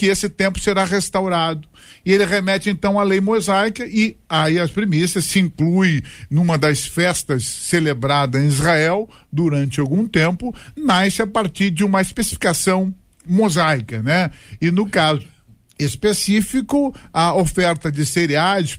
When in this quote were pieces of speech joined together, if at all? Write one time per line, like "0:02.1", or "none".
none